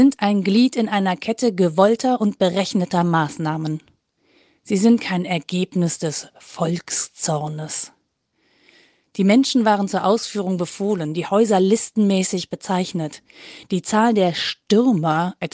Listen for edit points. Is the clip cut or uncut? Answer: uncut